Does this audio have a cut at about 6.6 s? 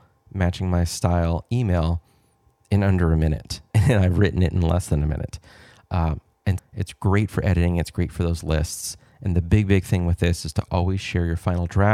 yes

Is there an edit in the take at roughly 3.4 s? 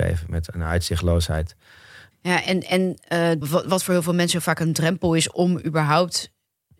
yes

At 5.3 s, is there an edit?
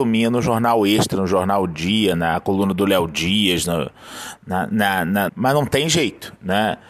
yes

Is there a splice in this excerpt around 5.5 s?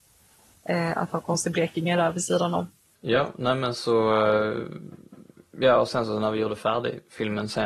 no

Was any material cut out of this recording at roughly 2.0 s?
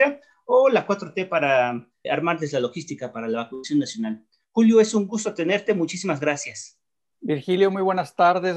yes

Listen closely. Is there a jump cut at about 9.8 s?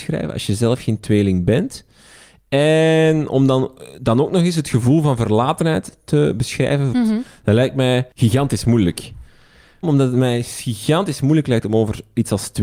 yes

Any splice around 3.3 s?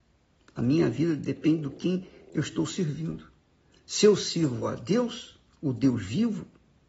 no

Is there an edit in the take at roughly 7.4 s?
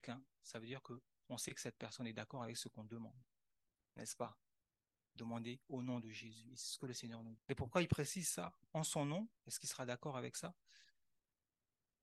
yes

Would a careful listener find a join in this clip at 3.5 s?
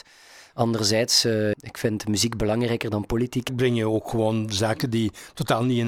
yes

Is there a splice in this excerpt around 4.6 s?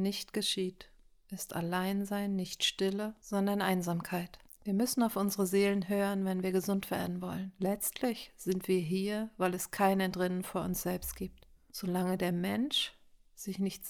yes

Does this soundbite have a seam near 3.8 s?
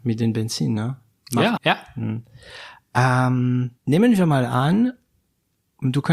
yes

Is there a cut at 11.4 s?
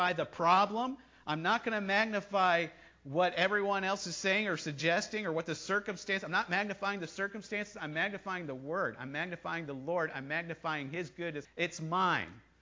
yes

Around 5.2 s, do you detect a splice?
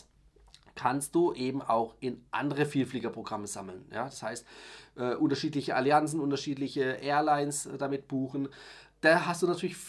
no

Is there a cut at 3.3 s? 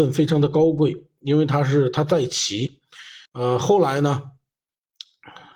yes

